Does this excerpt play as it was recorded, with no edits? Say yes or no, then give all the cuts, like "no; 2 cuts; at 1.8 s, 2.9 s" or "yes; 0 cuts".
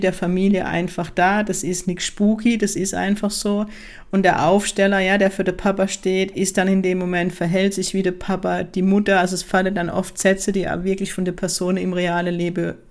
yes; 0 cuts